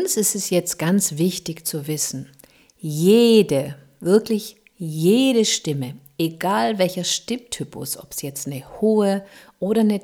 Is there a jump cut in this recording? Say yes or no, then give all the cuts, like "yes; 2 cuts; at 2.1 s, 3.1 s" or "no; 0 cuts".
no; 0 cuts